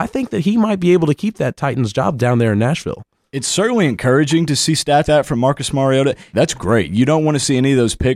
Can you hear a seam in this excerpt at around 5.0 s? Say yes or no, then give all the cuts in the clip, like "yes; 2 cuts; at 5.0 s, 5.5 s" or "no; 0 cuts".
yes; 2 cuts; at 5.0 s, 6.3 s